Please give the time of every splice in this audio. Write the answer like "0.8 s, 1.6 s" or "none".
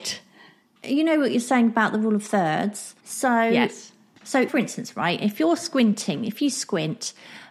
3.0 s, 4.5 s